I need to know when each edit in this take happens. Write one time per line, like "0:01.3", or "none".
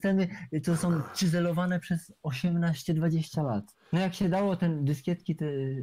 0:03.7